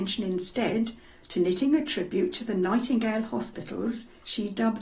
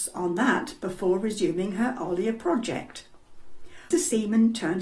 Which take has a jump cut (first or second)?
second